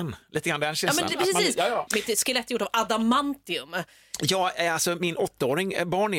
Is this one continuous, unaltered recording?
no; 1 cut; at 1.9 s

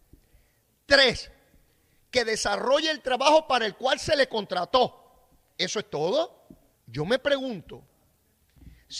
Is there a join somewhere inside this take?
yes; 1 cut; at 6.8 s

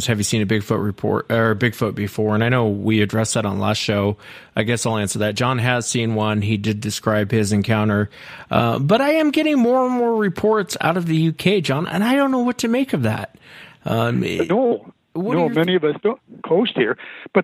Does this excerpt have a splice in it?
yes; 2 cuts; at 15.0 s, 16.4 s

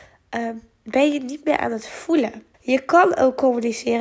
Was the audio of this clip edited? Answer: yes; 1 cut; at 2.5 s

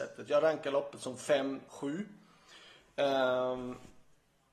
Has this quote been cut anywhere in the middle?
yes; 1 cut; at 1.7 s

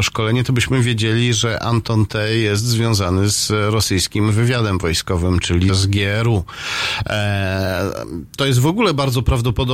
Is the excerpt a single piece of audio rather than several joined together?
no; 1 cut; at 5.7 s

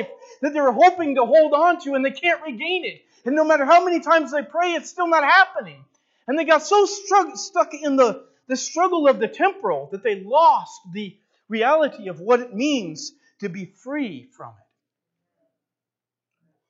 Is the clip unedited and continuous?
yes; 0 cuts

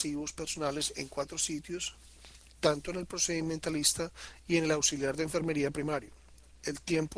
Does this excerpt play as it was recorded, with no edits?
yes; 0 cuts

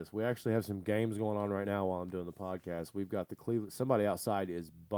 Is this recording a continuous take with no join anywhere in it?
yes; 0 cuts

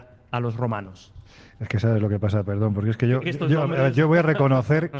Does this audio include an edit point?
no; 0 cuts

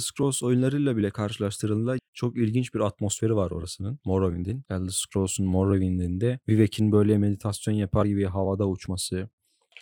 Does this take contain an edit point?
yes; 1 cut; at 4.6 s

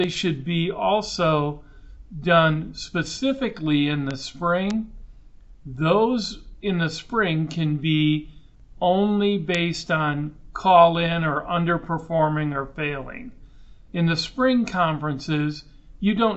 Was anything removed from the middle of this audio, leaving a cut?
no; 0 cuts

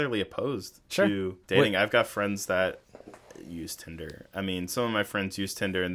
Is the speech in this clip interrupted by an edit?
yes; 1 cut; at 1.4 s

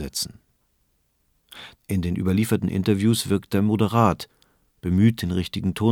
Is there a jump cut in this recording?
yes; 1 cut; at 1.7 s

